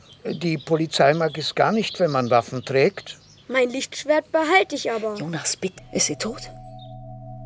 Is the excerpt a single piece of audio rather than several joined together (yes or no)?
no